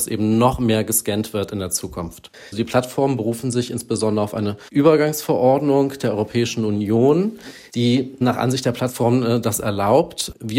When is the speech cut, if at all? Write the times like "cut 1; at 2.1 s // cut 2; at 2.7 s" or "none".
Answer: cut 1; at 2.3 s